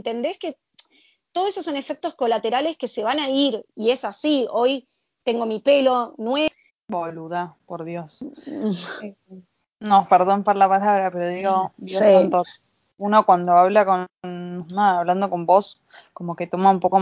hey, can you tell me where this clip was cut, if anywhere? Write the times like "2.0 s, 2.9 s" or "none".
6.7 s